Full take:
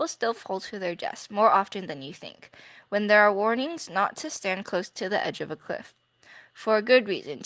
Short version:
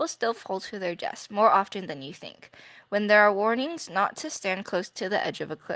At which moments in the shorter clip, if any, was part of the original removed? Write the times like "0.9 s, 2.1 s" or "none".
none